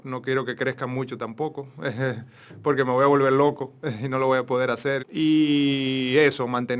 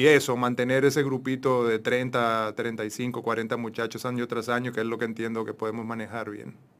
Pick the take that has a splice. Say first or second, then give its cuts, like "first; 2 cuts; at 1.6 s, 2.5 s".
first; 1 cut; at 5.0 s